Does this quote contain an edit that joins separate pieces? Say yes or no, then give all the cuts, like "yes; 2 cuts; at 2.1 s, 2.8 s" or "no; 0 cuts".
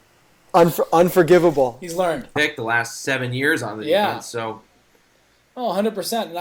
yes; 1 cut; at 2.4 s